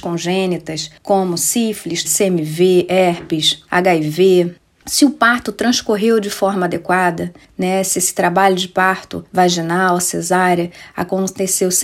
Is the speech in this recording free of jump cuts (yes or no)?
no